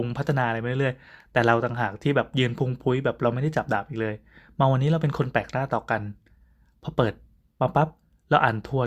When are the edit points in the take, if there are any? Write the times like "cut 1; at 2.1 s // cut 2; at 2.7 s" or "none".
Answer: none